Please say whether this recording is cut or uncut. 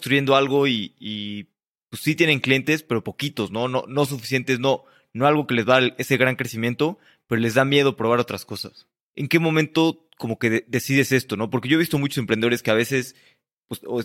cut